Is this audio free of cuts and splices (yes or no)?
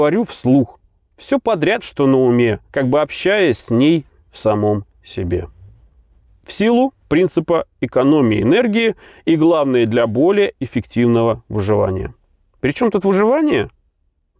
no